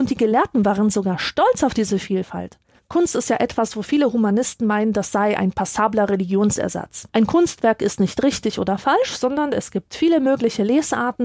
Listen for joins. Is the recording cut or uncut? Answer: cut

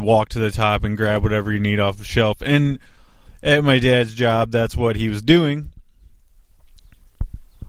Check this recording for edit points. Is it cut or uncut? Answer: uncut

